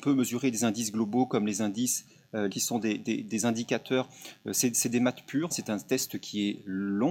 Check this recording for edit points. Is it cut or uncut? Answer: cut